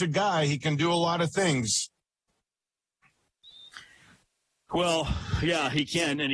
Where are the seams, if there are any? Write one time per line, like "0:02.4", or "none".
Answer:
none